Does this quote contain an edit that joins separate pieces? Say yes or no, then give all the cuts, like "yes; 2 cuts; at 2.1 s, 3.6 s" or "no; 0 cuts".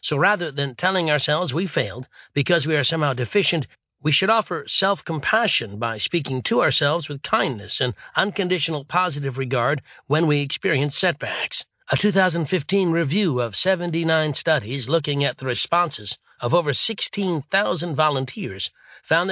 yes; 1 cut; at 11.7 s